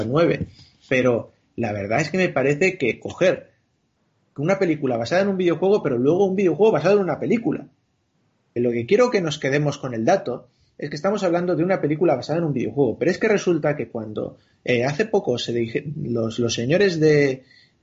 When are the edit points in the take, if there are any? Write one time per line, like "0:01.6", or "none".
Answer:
0:08.6